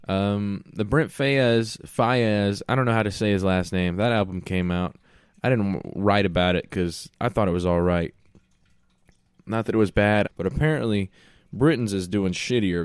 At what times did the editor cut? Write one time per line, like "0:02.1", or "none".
0:10.2